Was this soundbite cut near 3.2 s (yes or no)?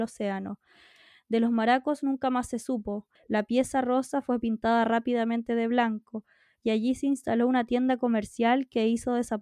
yes